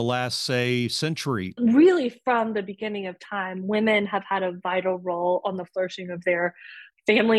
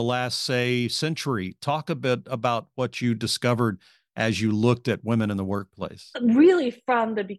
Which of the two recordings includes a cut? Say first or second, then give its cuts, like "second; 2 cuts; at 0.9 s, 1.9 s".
first; 1 cut; at 1.6 s